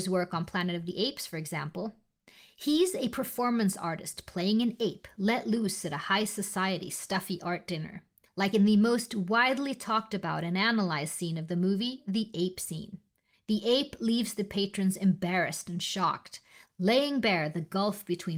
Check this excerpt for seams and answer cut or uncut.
cut